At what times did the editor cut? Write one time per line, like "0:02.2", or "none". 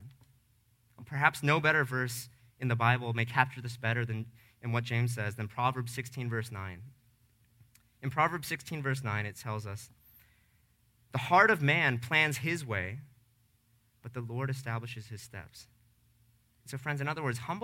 none